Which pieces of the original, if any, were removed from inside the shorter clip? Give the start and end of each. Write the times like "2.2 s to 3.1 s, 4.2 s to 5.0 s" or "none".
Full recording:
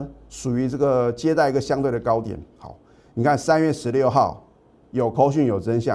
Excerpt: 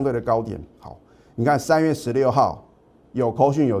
none